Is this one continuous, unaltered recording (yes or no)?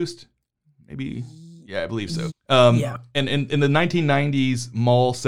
no